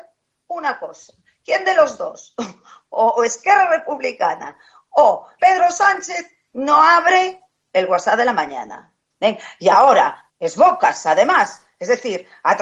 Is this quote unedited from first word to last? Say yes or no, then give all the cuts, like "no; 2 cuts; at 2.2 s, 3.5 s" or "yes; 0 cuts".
no; 3 cuts; at 5.4 s, 9.1 s, 10.3 s